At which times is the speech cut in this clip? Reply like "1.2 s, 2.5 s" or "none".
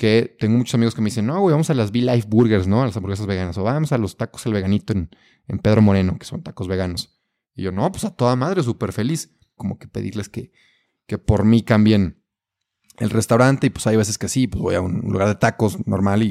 9.6 s